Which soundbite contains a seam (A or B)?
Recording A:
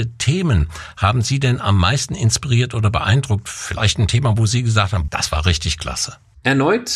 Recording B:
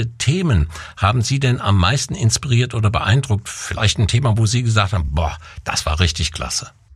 A